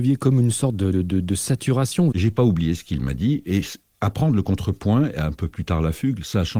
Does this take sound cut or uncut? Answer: cut